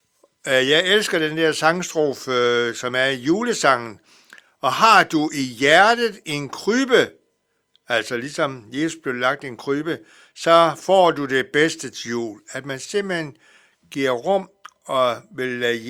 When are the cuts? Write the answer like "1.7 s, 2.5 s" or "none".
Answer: none

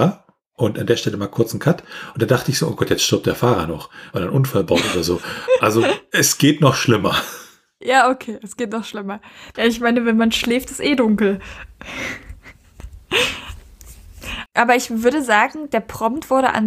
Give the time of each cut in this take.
9.5 s, 14.5 s

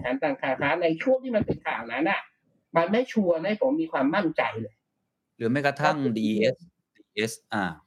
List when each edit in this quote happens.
none

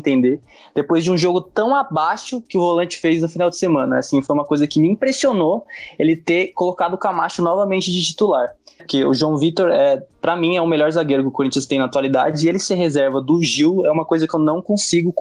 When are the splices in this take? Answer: 8.8 s

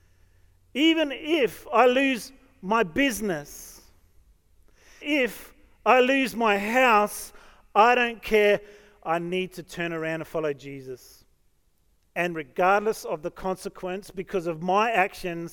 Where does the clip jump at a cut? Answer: 5.0 s

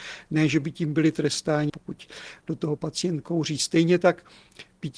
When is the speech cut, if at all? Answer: 1.7 s

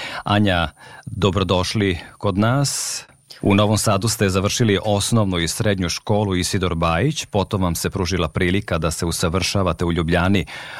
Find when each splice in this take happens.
3.4 s

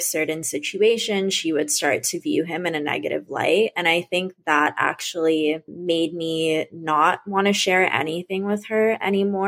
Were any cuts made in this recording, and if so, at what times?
none

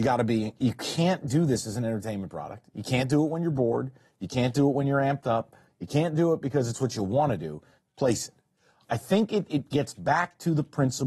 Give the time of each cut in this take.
7.8 s

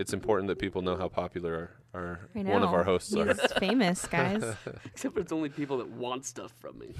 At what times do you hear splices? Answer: none

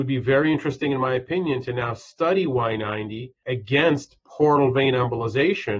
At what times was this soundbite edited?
none

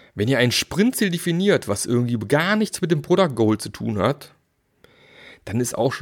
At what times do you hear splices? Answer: none

